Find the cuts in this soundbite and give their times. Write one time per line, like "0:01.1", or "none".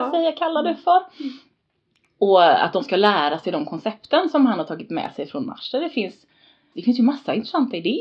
0:06.7